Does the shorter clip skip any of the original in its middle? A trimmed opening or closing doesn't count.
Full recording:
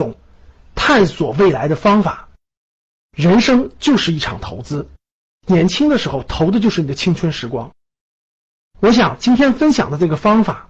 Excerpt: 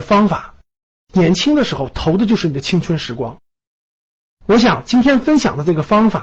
yes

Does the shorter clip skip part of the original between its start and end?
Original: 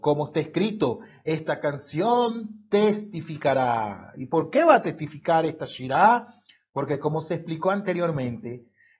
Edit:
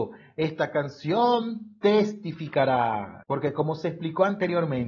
yes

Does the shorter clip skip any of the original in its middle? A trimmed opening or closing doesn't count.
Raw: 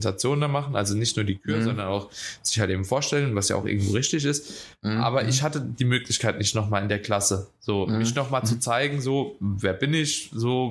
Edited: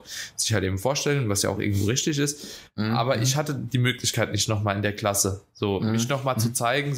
no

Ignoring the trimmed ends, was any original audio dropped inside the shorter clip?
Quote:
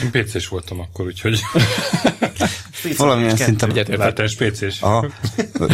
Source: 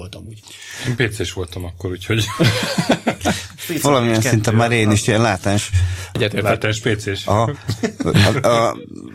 yes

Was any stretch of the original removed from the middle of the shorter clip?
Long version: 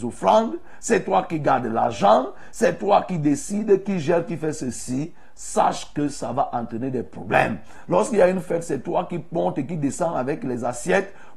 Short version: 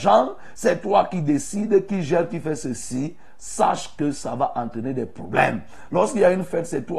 no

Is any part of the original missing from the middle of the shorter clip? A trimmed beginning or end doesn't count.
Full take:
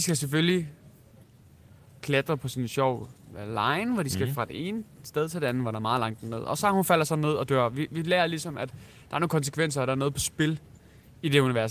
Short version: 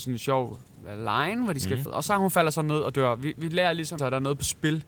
yes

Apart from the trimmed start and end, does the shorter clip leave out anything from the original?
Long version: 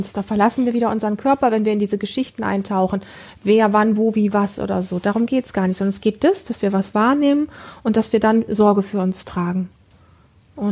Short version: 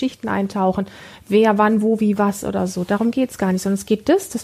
no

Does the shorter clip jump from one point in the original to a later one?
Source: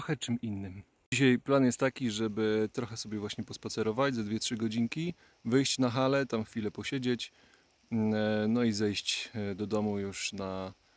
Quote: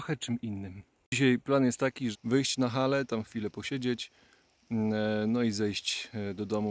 yes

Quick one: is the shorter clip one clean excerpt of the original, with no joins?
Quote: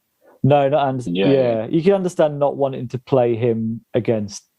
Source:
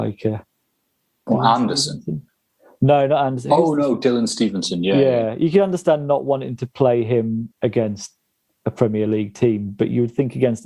no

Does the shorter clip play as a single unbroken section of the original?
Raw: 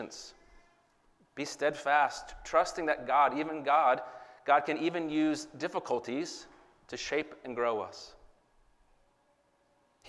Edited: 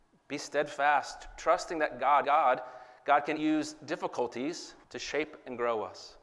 no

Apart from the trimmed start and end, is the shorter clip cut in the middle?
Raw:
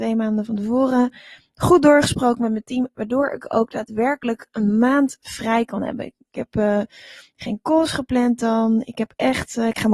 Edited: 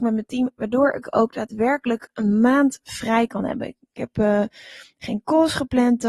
no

